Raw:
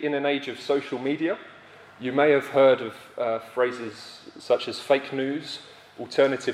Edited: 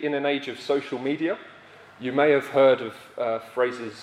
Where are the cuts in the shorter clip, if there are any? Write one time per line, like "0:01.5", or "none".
none